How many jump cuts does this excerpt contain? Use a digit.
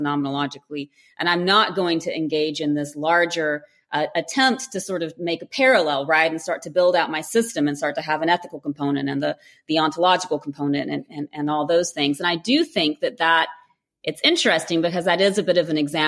0